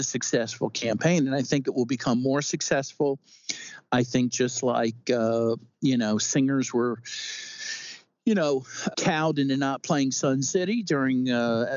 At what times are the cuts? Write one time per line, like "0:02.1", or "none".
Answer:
0:08.9

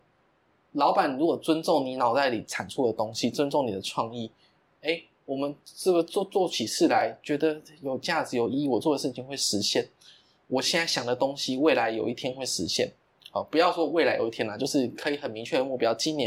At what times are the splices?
none

